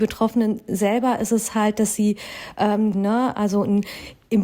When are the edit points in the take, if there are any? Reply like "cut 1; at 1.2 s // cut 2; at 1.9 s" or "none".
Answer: cut 1; at 2.9 s